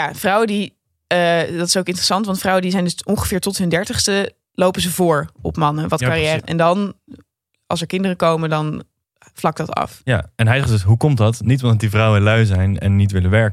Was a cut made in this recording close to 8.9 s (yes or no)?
no